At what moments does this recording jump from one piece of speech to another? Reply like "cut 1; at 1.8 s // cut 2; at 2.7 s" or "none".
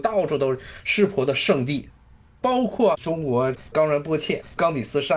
cut 1; at 2.9 s

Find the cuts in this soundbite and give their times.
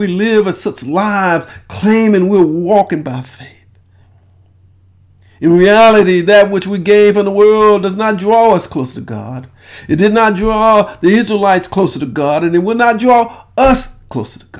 none

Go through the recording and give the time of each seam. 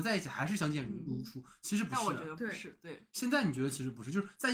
none

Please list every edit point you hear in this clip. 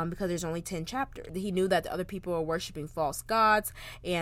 cut 1; at 1.3 s

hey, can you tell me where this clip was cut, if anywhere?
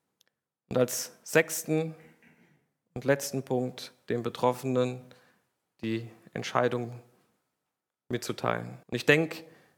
cut 1; at 8.8 s

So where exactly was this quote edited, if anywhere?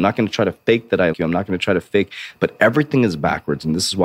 cut 1; at 1.1 s // cut 2; at 2.3 s

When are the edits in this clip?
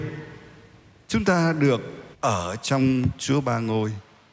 cut 1; at 2.1 s

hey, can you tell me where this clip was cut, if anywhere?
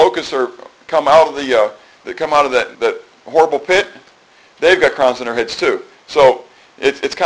cut 1; at 2.7 s

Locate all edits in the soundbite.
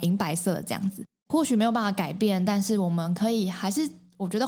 cut 1; at 1.3 s

